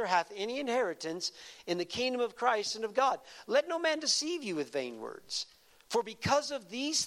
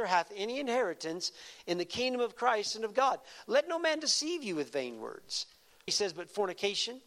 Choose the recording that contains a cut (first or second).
second